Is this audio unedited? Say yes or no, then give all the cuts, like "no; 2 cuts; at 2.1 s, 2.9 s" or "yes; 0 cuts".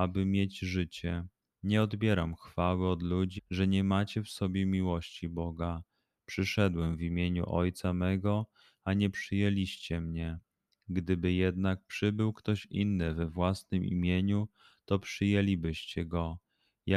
no; 1 cut; at 3.4 s